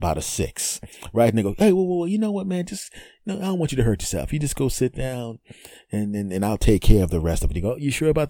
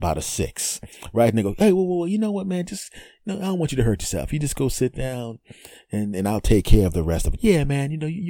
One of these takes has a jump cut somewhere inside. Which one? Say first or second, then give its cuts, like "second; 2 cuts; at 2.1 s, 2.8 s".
second; 2 cuts; at 6.1 s, 7.4 s